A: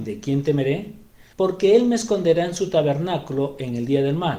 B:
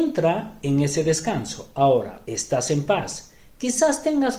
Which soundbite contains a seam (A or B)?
B